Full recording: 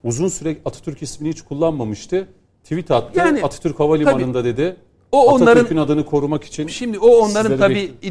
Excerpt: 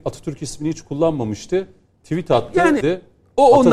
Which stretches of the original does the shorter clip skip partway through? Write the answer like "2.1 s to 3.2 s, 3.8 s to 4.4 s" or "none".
3.4 s to 4.6 s

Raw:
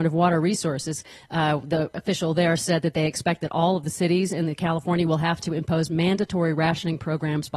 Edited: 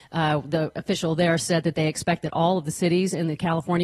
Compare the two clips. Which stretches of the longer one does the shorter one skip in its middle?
none

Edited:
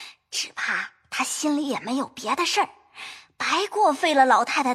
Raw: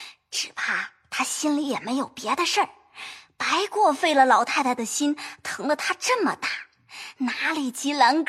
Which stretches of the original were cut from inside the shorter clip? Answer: none

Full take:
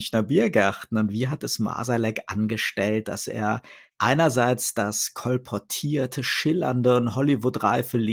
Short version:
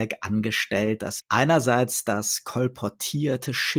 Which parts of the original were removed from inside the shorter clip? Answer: 3.3 s to 3.9 s

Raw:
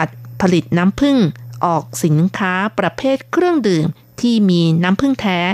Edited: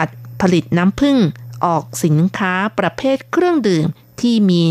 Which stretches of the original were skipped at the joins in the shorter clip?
none

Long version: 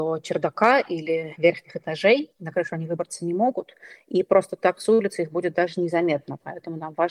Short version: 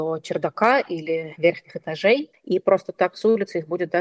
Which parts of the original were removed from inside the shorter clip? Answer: 2.3 s to 4.0 s

